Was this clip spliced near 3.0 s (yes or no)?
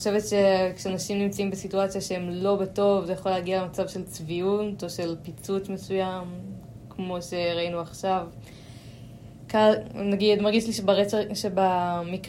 no